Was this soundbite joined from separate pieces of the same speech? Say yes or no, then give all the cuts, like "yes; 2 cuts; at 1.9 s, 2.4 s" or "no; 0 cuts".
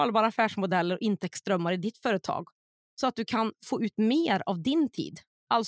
no; 0 cuts